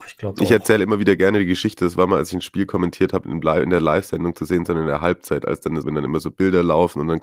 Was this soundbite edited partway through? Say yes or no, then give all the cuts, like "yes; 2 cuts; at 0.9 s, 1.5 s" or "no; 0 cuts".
yes; 2 cuts; at 3.2 s, 5.8 s